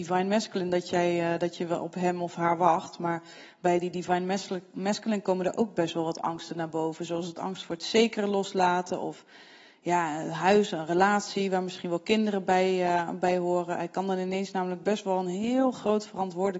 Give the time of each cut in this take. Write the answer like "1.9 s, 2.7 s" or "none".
none